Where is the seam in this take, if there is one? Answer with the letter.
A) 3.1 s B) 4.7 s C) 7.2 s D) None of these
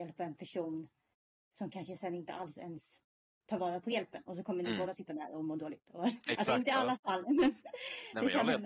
D